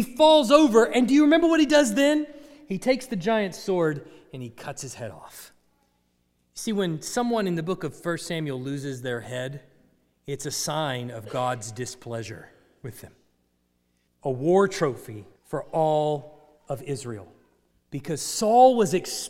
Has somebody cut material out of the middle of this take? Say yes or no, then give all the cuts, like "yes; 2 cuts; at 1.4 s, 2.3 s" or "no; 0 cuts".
yes; 3 cuts; at 14.1 s, 15.4 s, 17.7 s